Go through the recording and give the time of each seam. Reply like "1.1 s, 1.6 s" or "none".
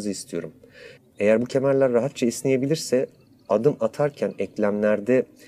1.0 s